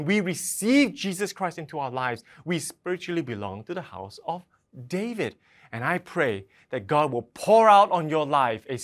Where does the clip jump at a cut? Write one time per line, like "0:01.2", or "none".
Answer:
none